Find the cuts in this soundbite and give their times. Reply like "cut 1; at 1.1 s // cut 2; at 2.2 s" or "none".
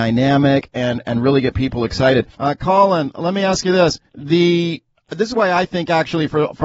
cut 1; at 2.3 s // cut 2; at 4.1 s